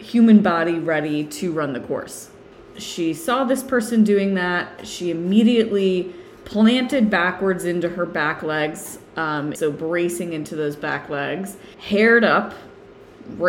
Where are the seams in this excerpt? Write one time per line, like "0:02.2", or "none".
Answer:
0:02.7
0:09.6
0:11.7